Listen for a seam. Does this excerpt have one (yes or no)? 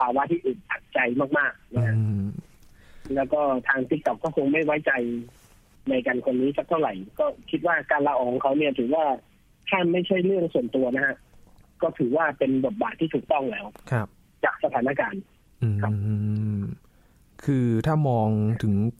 no